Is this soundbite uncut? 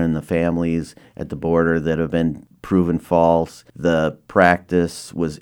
yes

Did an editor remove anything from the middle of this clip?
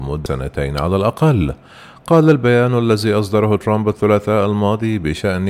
no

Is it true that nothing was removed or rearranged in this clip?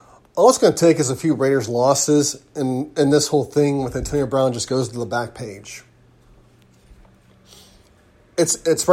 yes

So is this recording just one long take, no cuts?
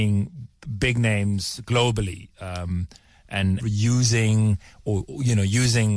no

